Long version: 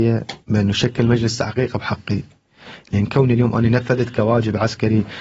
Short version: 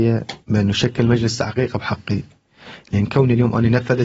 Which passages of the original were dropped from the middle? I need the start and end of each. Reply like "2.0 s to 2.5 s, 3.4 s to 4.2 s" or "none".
none